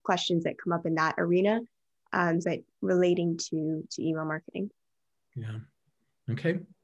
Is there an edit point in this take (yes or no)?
yes